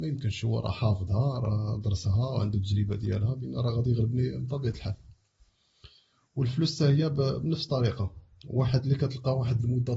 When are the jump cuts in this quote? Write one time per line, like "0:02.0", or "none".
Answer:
none